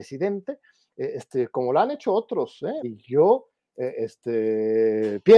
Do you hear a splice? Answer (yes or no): yes